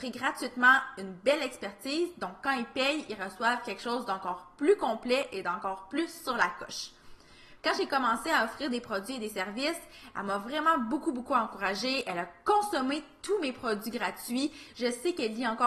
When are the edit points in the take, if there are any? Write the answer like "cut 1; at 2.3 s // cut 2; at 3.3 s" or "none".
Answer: cut 1; at 7.6 s